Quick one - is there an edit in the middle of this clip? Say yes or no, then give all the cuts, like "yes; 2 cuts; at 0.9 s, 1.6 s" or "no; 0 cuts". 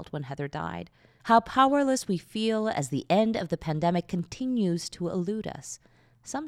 yes; 1 cut; at 1.2 s